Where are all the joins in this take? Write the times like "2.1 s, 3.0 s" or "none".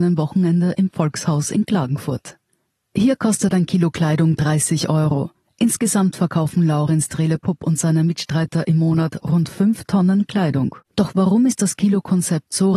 10.8 s